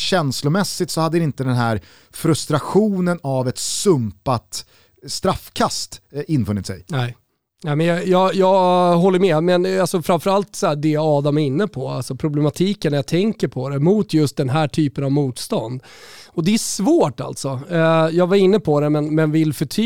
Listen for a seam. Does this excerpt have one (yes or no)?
no